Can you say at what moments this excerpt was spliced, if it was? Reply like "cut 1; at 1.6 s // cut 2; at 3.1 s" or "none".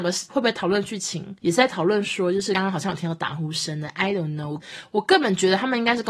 cut 1; at 2.5 s